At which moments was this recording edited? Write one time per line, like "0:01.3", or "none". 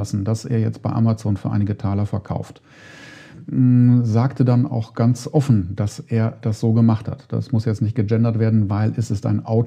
none